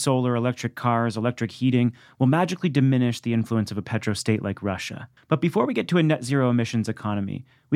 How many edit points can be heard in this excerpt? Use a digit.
1